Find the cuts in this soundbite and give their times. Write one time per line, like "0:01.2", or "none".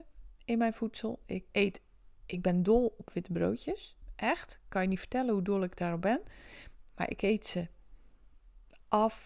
0:01.5